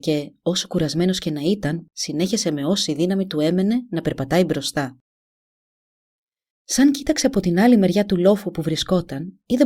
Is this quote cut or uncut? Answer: cut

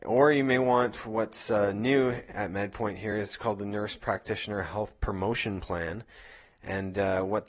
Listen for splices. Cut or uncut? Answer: uncut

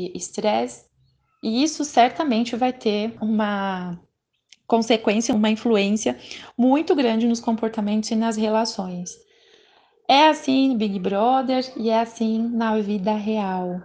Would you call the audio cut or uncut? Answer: uncut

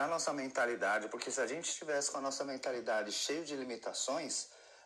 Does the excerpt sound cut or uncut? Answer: uncut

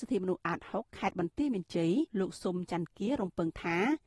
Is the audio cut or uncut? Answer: cut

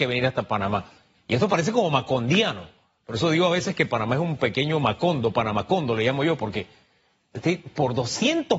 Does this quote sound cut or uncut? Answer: cut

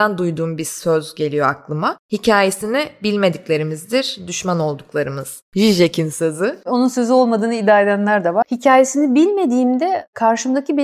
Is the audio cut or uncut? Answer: cut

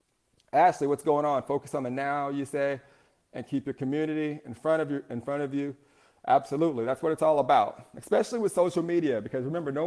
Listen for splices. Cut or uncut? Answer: uncut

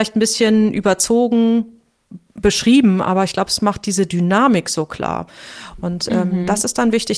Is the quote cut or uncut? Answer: uncut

